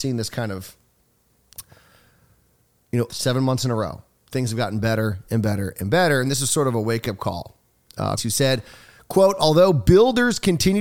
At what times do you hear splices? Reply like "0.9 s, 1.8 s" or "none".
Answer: 3.1 s, 8.2 s